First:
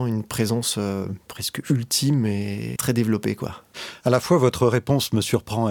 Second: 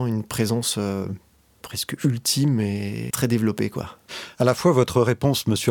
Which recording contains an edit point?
first; 1 cut; at 1.2 s

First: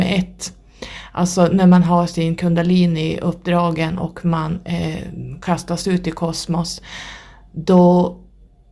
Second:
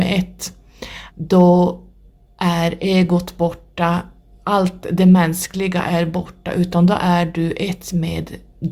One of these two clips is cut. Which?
second; 1 cut; at 1.1 s

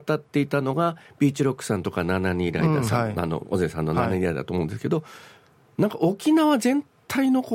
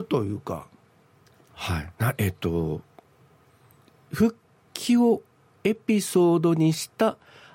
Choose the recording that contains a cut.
second; 1 cut; at 1.9 s

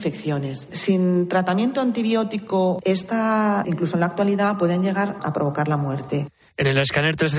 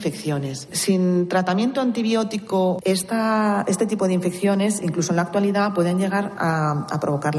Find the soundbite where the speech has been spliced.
first; 2 cuts; at 3.6 s, 5.2 s

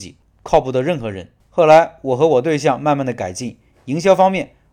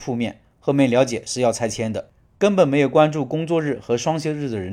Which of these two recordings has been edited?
first; 1 cut; at 1.4 s

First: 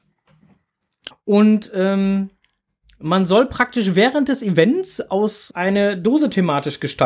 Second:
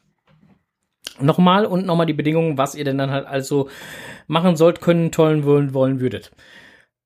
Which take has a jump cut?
first; 2 cuts; at 1.1 s, 5.5 s

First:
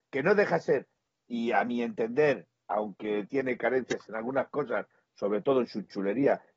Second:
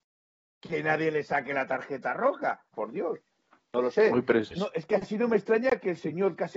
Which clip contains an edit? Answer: second; 2 cuts; at 2.7 s, 4.5 s

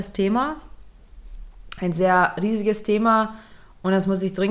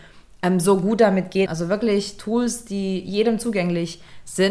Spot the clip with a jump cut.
second; 1 cut; at 1.5 s

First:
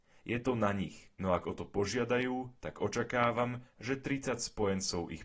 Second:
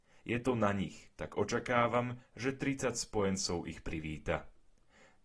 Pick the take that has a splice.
second; 1 cut; at 1.2 s

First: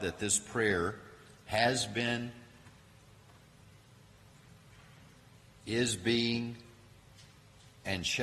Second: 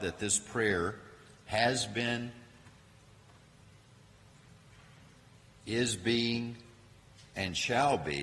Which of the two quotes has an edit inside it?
second; 1 cut; at 7.3 s

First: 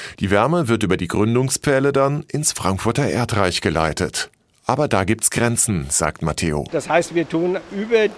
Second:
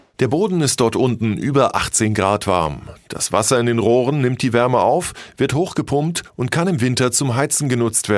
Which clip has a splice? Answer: first; 1 cut; at 6.7 s

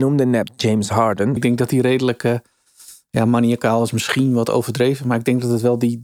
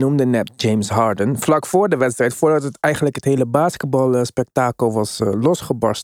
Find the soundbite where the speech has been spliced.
first; 1 cut; at 1.4 s

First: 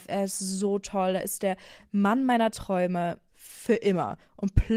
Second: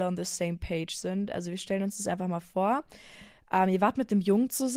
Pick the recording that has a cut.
first; 1 cut; at 3.3 s

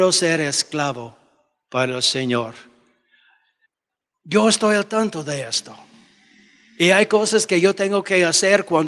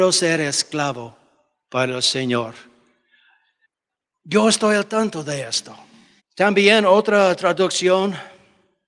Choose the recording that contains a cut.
second; 1 cut; at 6.2 s

